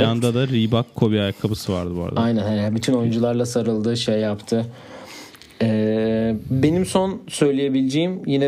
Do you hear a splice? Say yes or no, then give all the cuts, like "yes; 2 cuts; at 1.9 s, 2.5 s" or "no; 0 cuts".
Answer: no; 0 cuts